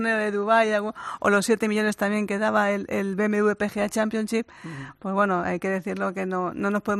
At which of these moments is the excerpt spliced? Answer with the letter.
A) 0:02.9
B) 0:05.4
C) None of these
C